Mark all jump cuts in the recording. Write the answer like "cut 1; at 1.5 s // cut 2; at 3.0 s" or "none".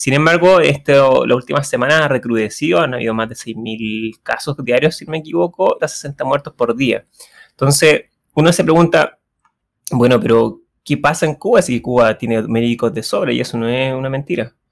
cut 1; at 5.8 s